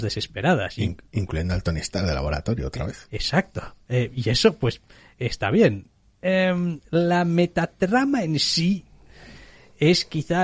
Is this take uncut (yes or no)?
yes